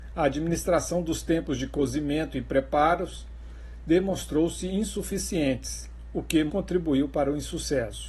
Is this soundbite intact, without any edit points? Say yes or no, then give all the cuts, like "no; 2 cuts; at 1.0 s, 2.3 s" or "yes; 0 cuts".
no; 1 cut; at 6.5 s